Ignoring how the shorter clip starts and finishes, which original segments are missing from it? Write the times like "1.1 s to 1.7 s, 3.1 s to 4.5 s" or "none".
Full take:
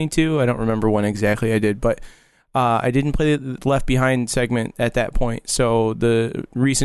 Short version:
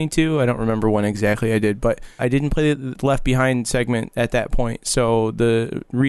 2.2 s to 2.8 s